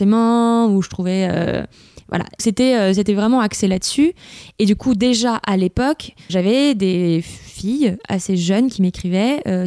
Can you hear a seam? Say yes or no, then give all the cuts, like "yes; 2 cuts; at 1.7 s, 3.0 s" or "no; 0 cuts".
yes; 2 cuts; at 2.4 s, 6.3 s